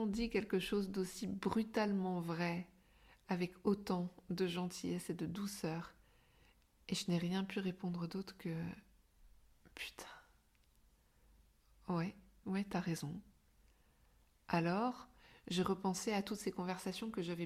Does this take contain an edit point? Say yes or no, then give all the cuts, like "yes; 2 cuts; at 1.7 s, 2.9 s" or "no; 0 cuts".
yes; 1 cut; at 12.4 s